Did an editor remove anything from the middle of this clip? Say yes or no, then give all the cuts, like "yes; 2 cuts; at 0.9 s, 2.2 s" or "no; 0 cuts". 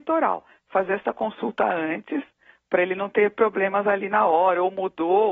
no; 0 cuts